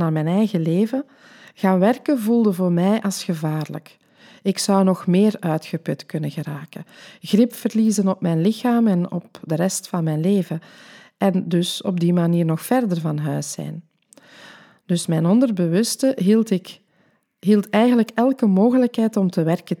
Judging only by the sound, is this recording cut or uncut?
uncut